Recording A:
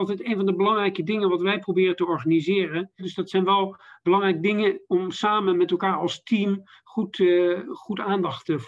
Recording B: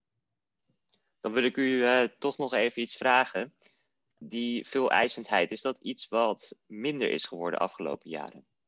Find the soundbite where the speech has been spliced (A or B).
A